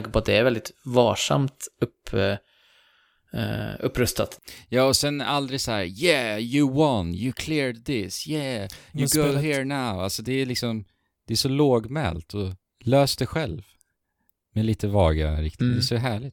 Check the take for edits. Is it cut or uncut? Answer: uncut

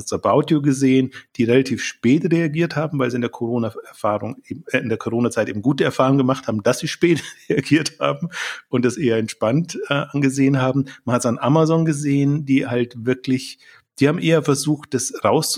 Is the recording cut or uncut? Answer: uncut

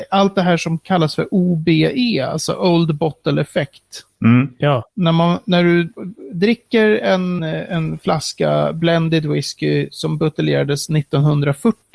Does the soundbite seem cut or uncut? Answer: cut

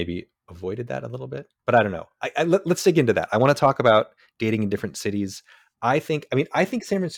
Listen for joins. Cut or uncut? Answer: uncut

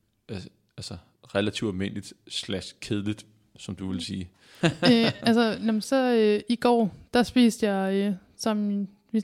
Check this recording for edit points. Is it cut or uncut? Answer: cut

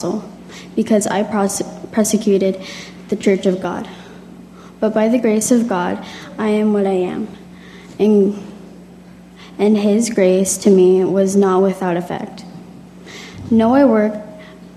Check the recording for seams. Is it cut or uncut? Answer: uncut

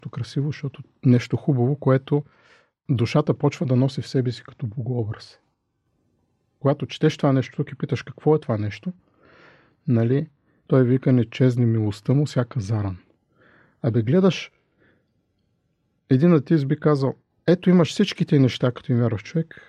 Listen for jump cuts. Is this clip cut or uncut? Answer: uncut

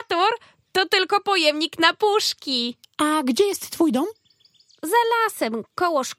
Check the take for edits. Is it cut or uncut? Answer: cut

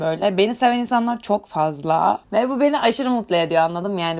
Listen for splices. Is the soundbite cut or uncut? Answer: cut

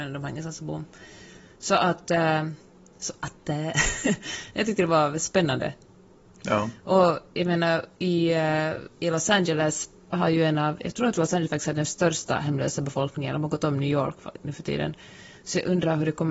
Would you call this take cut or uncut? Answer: uncut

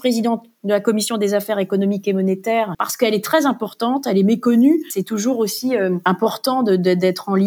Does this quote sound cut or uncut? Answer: cut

